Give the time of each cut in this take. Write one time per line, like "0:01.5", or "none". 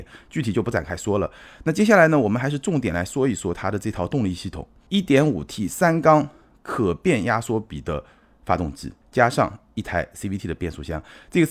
none

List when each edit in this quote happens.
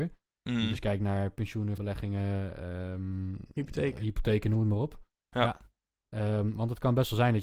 0:01.8

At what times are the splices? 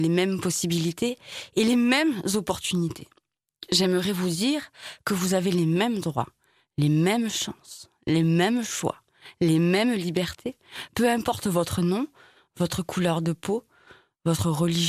none

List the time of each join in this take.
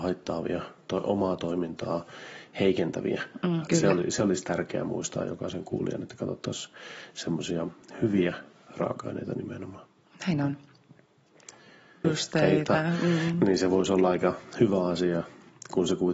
0:03.7
0:12.0

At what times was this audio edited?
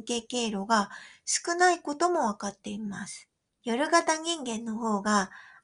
0:03.5

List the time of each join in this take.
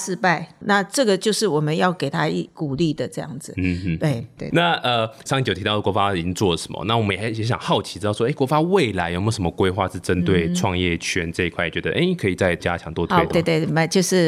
0:04.4
0:13.3

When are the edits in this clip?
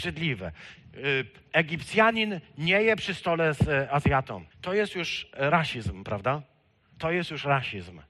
0:04.5

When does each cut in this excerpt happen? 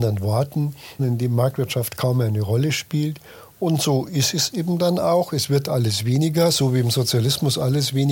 0:01.0

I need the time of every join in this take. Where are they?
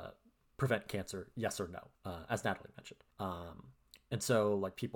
0:01.9
0:03.1

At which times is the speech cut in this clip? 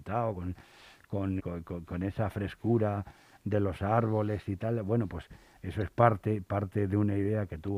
0:01.4

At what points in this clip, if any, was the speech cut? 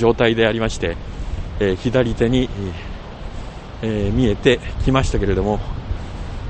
none

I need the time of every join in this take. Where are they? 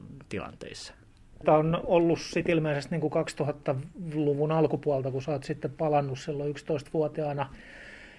0:01.4

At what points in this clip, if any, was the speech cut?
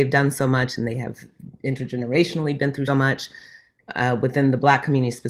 0:02.9

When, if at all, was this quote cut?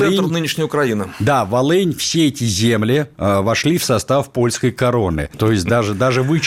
0:03.1
0:05.3

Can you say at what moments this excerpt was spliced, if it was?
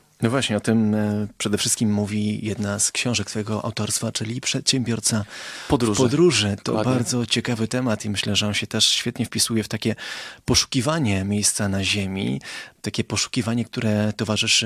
none

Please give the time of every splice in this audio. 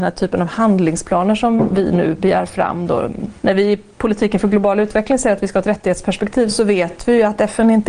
0:03.4

